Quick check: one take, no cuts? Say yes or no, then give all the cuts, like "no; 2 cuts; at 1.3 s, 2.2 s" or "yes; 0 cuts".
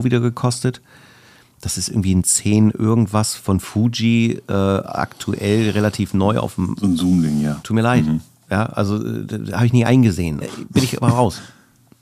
no; 2 cuts; at 7.6 s, 10.4 s